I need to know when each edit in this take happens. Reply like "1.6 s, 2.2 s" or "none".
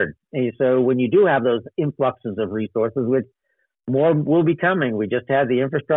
none